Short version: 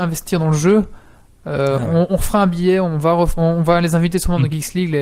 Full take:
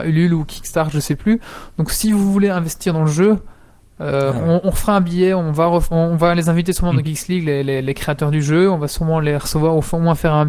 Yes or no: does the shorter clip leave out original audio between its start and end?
no